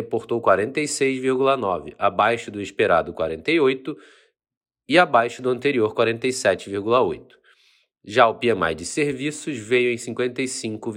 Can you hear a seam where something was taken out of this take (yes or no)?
no